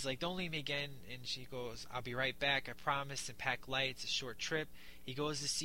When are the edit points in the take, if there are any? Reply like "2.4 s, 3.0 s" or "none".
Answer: none